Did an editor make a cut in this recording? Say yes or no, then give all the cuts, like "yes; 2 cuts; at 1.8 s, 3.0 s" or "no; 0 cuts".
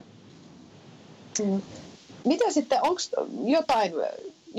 no; 0 cuts